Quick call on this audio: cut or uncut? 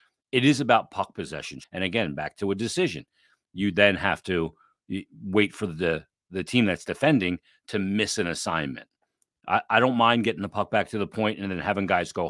cut